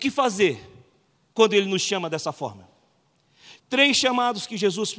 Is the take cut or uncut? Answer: cut